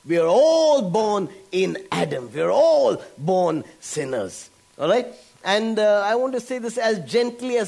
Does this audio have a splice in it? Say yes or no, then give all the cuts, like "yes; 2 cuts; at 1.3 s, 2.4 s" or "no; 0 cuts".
no; 0 cuts